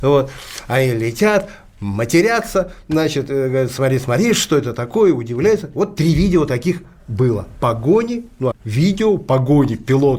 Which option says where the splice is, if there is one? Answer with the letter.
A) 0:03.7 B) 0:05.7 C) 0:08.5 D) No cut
C